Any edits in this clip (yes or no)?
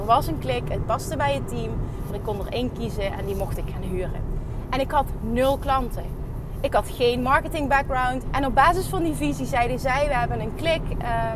yes